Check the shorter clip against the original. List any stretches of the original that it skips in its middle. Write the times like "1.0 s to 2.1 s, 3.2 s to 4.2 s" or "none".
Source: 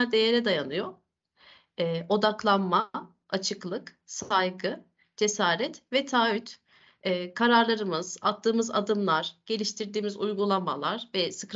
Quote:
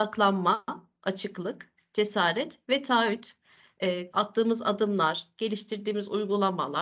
4.0 s to 5.0 s, 7.3 s to 8.2 s